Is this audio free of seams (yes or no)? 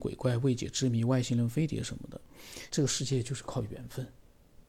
no